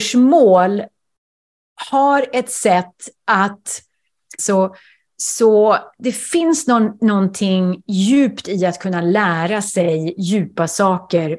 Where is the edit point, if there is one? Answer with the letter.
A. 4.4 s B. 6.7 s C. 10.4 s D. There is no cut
A